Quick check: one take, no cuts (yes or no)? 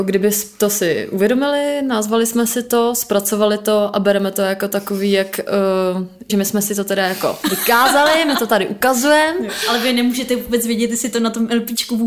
no